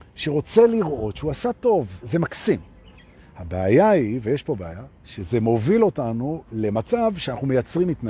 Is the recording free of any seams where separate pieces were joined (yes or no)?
no